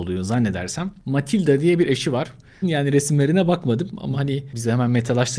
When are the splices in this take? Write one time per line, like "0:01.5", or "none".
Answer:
0:02.6